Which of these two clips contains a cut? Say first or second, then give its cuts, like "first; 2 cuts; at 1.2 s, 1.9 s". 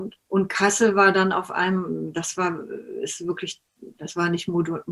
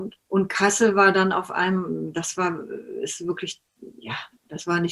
first; 1 cut; at 3.9 s